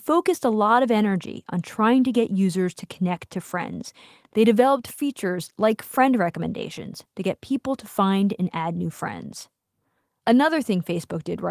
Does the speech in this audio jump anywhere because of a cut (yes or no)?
no